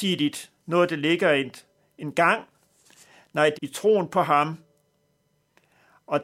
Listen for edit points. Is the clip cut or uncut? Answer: cut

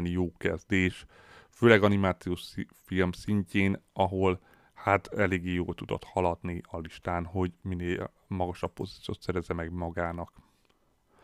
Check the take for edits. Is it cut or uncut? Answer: uncut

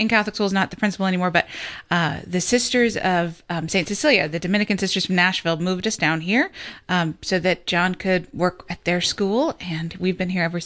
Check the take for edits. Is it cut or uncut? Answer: uncut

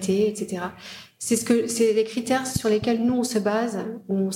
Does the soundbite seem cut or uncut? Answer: uncut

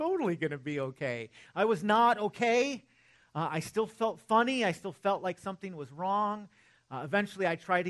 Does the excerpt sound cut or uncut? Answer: uncut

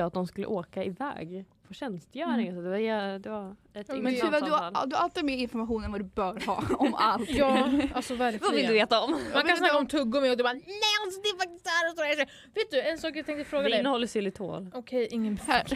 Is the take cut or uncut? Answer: uncut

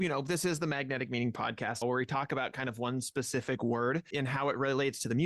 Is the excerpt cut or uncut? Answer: cut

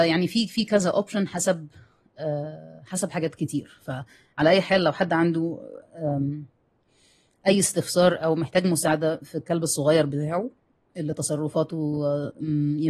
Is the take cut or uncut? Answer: uncut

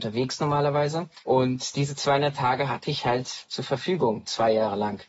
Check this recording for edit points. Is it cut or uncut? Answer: cut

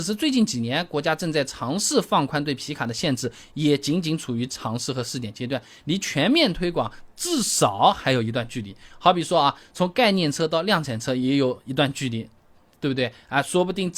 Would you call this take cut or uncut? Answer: uncut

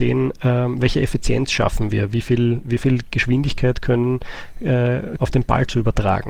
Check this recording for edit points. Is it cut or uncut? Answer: cut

